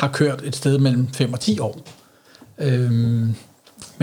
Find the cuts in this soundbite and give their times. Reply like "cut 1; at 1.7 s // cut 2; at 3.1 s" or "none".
cut 1; at 2.4 s